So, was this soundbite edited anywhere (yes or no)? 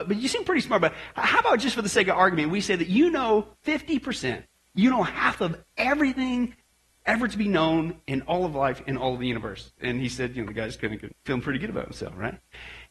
yes